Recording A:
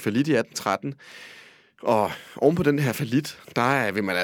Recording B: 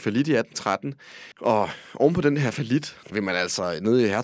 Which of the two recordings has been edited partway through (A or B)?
B